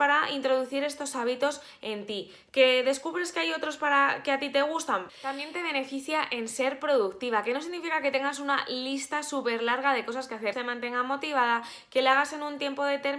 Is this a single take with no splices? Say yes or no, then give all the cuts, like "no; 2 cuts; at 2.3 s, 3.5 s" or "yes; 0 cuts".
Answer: no; 2 cuts; at 5.1 s, 10.5 s